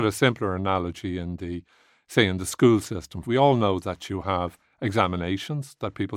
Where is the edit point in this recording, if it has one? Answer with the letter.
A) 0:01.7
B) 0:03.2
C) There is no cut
B